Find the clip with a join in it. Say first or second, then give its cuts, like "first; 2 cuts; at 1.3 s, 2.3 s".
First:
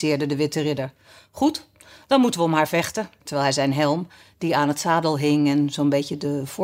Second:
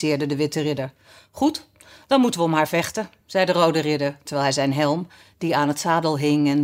first; 1 cut; at 3.2 s